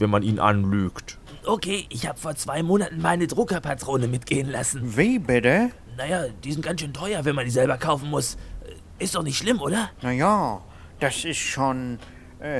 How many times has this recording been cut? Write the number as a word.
one